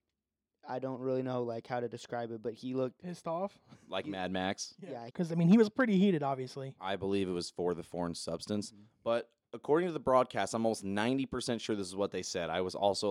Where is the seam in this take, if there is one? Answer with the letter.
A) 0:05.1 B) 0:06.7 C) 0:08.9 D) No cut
A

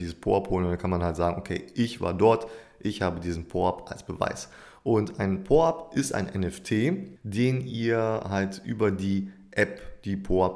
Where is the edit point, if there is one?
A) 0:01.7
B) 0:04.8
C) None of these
C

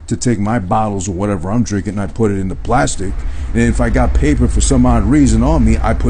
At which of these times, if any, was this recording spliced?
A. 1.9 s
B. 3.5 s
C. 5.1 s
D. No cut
B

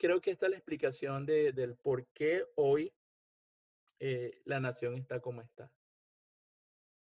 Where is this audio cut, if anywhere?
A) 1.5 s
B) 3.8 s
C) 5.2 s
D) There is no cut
D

